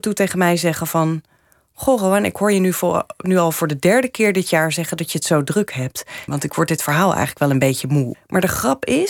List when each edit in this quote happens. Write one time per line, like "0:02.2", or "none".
0:06.3
0:08.1